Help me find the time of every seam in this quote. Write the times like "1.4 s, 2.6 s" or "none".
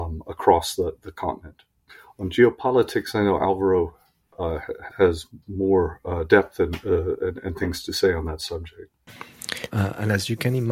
4.9 s, 9.7 s